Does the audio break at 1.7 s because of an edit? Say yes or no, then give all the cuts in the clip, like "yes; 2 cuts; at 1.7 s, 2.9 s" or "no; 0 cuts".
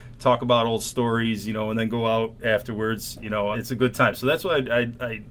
no; 1 cut; at 3.5 s